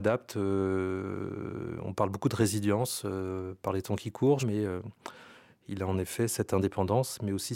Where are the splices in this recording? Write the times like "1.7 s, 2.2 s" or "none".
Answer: 4.4 s